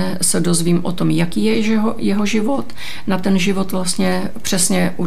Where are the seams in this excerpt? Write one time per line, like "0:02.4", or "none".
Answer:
none